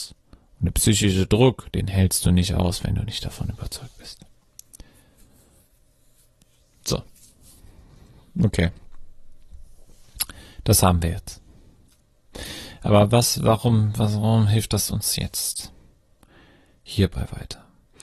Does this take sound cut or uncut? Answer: uncut